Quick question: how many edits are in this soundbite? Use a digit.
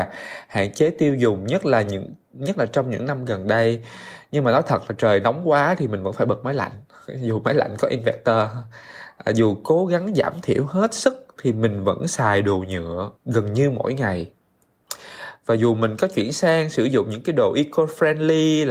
1